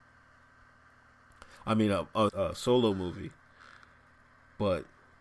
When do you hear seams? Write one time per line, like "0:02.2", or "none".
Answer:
0:02.3